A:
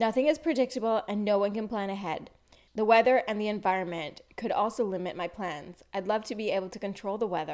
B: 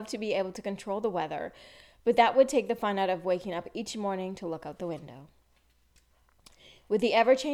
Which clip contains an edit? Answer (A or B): A